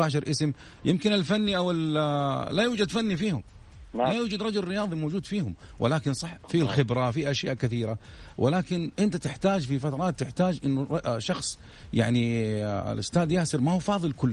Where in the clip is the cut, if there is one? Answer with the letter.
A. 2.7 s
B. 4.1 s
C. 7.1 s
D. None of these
C